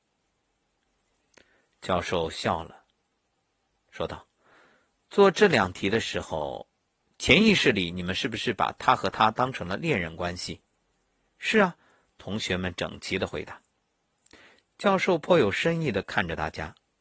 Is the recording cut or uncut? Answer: uncut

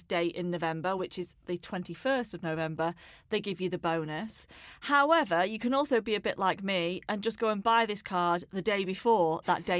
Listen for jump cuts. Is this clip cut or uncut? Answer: uncut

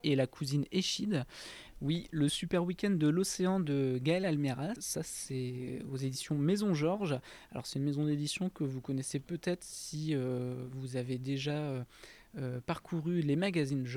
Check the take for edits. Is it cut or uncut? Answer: cut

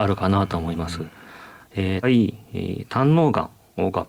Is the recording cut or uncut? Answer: cut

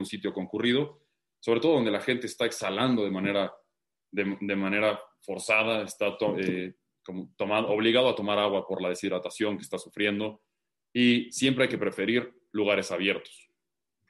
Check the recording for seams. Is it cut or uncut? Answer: uncut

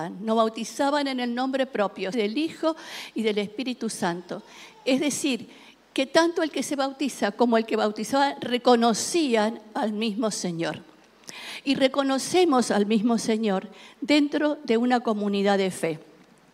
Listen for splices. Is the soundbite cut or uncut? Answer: cut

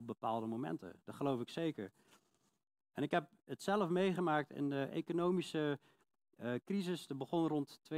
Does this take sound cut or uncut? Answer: uncut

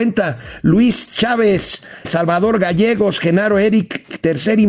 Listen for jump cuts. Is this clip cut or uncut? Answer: cut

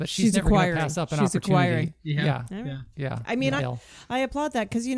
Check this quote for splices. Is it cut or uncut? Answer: cut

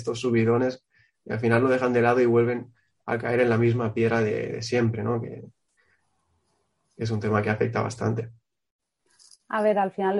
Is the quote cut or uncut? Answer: uncut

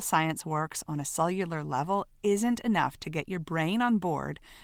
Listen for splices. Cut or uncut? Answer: uncut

